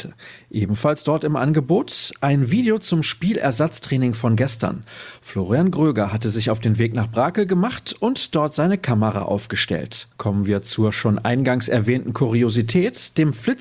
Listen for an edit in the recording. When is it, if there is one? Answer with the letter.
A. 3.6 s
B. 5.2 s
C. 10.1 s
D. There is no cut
C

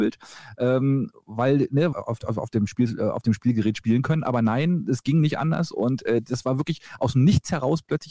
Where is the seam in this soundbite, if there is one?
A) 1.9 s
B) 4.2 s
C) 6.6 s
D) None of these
A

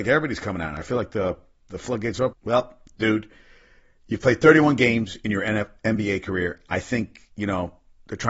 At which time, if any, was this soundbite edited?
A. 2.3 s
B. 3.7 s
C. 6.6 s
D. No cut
A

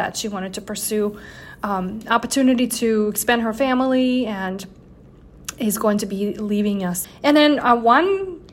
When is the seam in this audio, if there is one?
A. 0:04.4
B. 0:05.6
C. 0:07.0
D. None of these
C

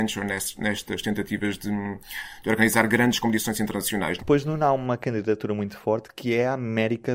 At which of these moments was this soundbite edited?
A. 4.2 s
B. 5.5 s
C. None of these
A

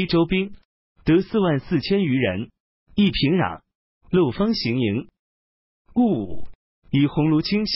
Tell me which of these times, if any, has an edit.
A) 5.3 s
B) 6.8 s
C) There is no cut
C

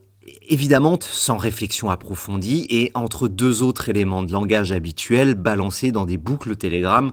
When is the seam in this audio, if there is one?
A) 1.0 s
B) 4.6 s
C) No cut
A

